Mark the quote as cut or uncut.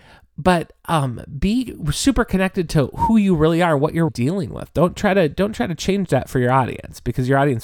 cut